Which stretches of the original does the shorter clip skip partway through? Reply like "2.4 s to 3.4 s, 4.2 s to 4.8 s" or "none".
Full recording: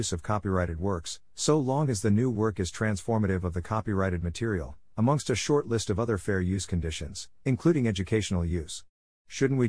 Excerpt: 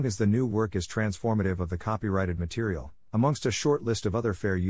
none